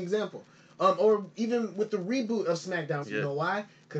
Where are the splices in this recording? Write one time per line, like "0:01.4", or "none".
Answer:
0:03.0